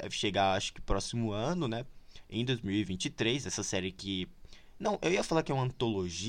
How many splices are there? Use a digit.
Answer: 0